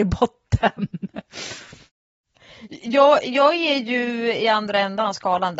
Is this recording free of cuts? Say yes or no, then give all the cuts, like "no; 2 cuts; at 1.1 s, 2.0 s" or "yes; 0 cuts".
yes; 0 cuts